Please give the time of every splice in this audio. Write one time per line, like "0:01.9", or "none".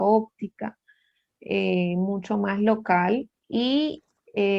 0:03.4